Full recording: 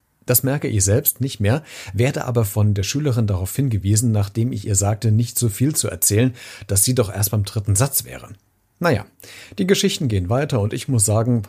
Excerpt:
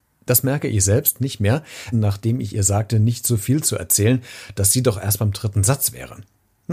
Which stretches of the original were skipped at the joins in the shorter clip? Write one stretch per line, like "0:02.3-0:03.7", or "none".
0:01.9-0:04.0

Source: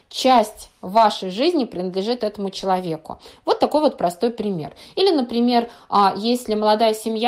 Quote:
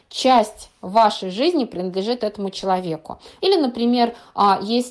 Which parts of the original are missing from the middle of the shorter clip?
0:03.4-0:04.9

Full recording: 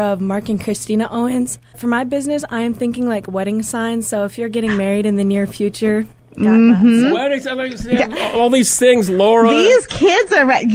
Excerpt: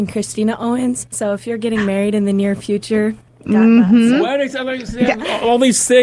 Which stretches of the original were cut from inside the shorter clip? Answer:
0:01.6-0:04.0

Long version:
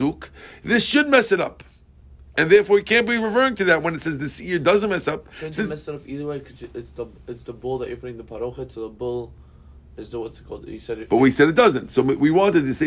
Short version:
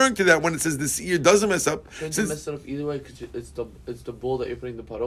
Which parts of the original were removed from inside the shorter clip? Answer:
none

